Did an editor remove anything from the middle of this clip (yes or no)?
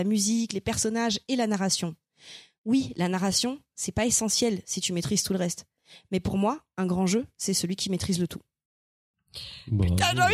no